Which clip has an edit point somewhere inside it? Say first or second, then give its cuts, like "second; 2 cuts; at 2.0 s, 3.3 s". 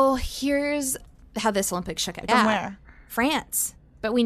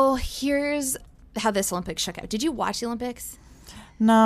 first; 1 cut; at 2.3 s